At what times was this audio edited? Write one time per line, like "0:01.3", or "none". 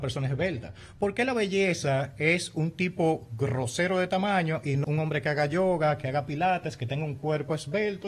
0:04.8

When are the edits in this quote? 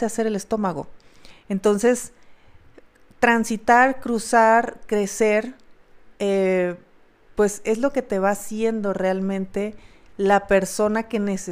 none

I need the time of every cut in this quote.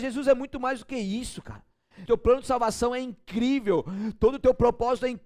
0:02.1

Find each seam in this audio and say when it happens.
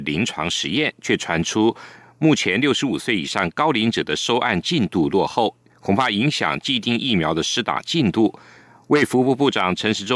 none

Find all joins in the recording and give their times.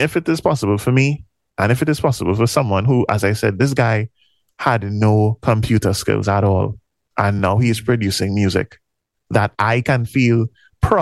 none

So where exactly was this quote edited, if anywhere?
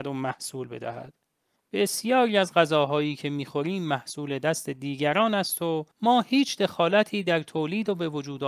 0:01.6
0:05.9

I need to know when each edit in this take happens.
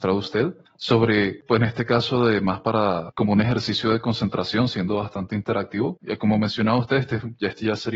0:06.0

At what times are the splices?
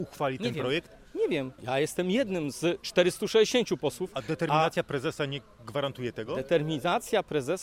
none

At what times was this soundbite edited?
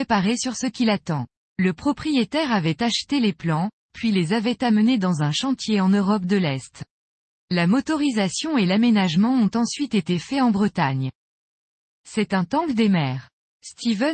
0:01.4

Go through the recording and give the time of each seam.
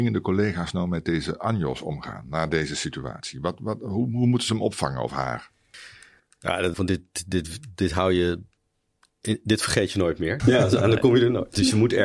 0:06.7
0:10.4

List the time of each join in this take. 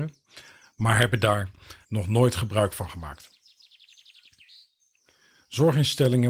0:01.8

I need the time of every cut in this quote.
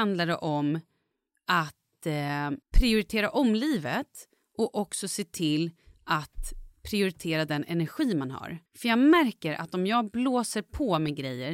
0:02.6
0:08.7

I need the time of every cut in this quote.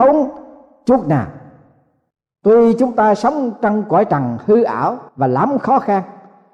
0:05.1

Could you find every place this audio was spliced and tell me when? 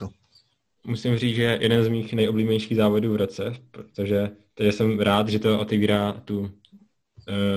none

